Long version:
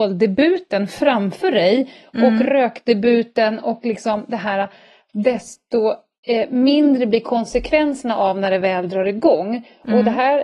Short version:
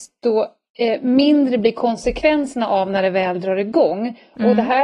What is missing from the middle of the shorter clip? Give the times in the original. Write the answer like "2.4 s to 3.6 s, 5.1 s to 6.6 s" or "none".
none